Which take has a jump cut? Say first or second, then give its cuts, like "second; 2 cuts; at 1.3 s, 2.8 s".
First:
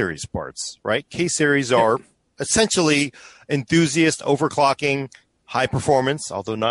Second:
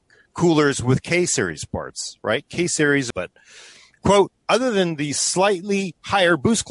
second; 1 cut; at 3.1 s